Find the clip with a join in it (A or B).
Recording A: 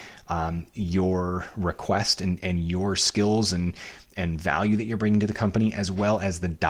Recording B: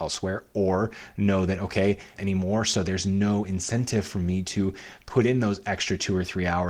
B